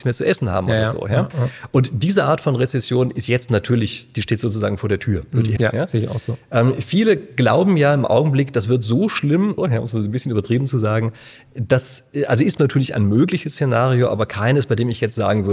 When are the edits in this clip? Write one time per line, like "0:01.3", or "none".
0:05.6
0:09.6